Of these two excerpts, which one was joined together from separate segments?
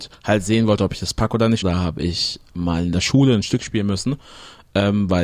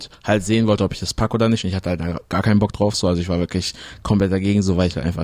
first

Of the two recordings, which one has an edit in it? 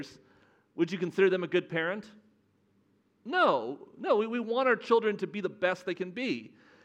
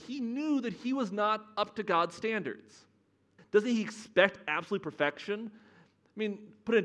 second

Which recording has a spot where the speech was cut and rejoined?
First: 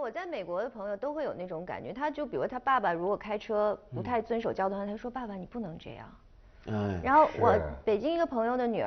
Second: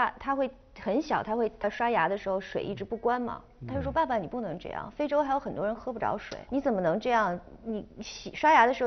second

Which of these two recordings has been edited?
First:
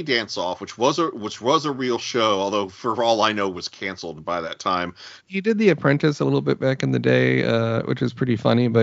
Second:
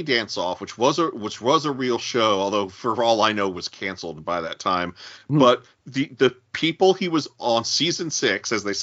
first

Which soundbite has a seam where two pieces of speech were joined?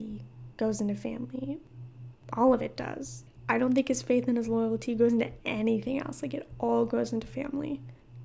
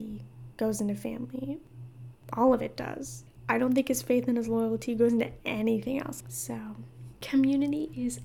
second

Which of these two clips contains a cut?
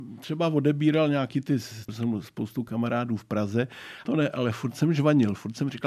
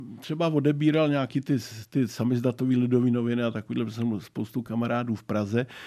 first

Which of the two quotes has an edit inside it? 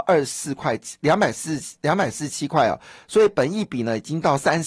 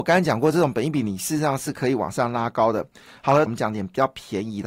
second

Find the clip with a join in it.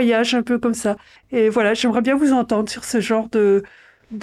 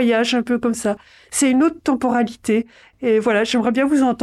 first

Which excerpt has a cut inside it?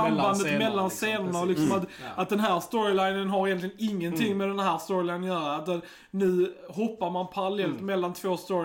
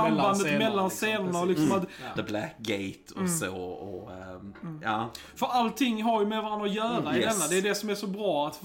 second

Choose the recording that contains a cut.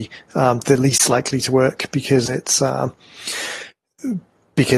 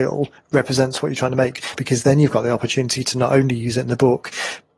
second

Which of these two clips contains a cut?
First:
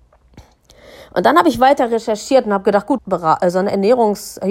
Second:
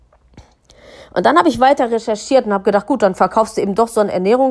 first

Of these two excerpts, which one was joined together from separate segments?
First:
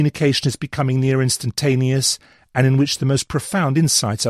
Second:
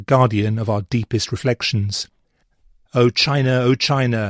second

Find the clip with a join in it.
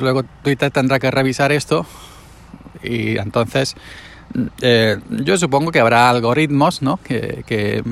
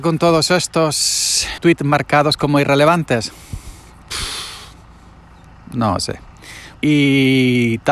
second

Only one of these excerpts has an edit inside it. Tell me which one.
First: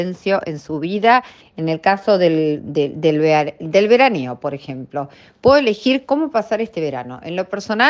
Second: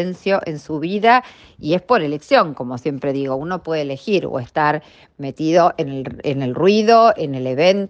first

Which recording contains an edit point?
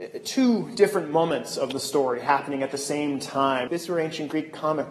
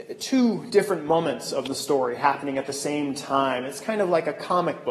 first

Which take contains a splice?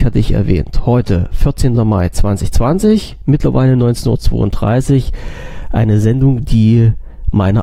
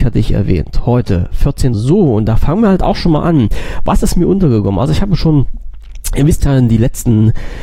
second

